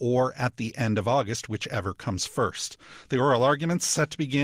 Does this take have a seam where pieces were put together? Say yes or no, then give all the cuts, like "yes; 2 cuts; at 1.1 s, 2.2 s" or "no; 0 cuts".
no; 0 cuts